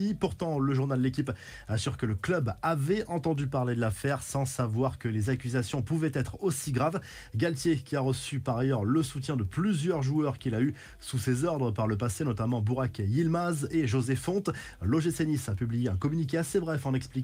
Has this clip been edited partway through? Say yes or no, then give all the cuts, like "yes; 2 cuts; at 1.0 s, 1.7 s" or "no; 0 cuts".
no; 0 cuts